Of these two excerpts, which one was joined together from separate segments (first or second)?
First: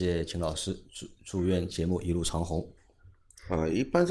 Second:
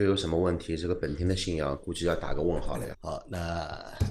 second